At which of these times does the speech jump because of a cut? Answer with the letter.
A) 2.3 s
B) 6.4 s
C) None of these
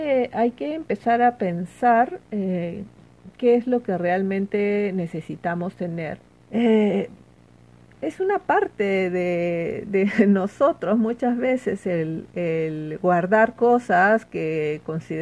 B